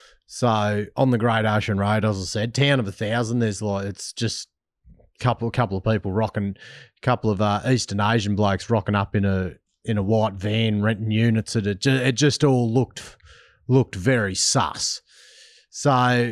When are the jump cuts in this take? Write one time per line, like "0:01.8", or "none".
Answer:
none